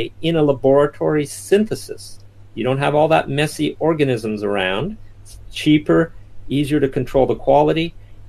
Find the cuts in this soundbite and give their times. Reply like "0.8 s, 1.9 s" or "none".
none